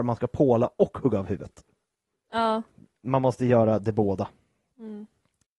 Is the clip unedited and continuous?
yes; 0 cuts

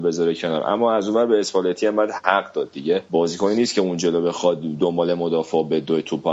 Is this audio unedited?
no; 1 cut; at 3.1 s

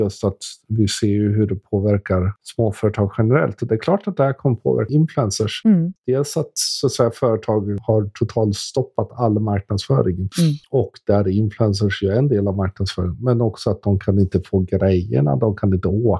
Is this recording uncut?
yes; 0 cuts

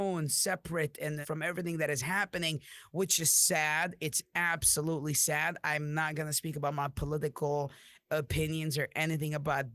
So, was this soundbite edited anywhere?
yes; 1 cut; at 1.2 s

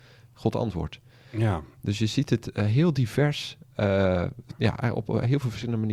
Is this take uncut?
yes; 0 cuts

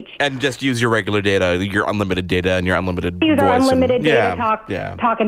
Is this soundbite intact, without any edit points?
yes; 0 cuts

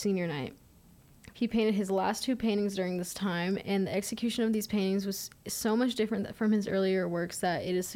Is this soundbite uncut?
no; 1 cut; at 1.3 s

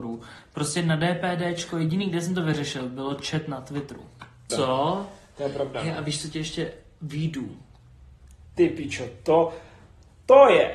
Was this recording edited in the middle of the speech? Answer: yes; 1 cut; at 4.5 s

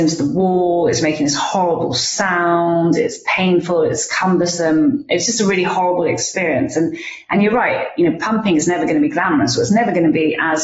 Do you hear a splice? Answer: no; 0 cuts

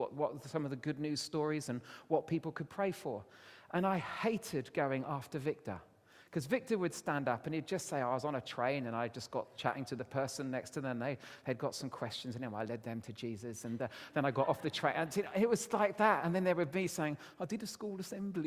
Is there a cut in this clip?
no; 0 cuts

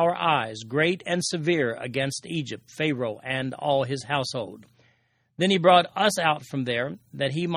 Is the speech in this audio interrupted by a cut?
no; 0 cuts

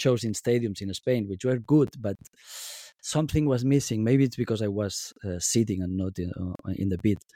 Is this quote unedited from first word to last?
yes; 0 cuts

